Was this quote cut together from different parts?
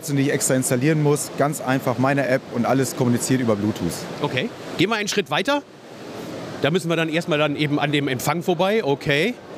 no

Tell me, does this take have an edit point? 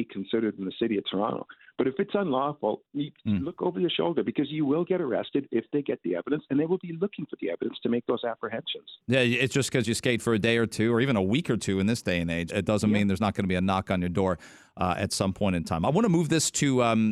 yes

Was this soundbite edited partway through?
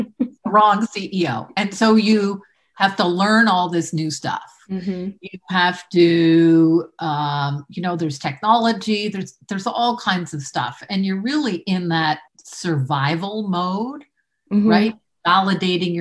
yes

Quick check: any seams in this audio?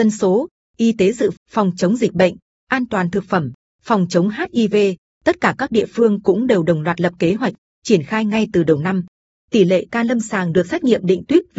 yes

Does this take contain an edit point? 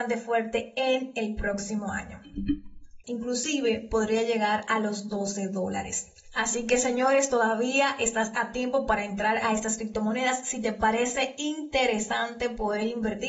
yes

